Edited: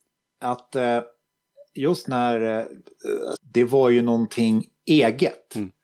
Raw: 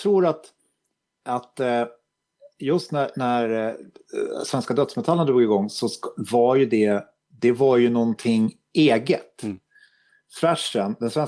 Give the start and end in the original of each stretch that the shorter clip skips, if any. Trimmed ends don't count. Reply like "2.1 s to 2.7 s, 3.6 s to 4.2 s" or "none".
2.9 s to 3.1 s, 4.4 s to 7.2 s